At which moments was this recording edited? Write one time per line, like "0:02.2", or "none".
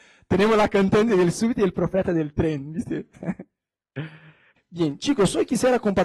0:03.1